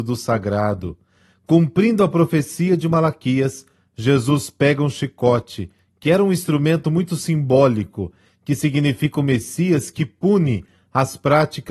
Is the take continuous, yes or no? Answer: yes